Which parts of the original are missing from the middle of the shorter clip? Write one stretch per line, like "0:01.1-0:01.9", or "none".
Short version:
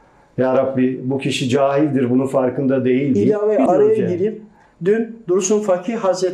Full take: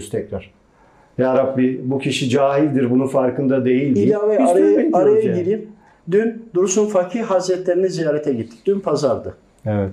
0:04.5-0:04.9